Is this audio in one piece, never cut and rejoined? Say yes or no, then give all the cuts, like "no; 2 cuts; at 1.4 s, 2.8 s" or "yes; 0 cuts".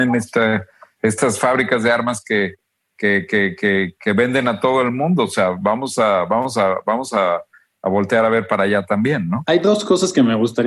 yes; 0 cuts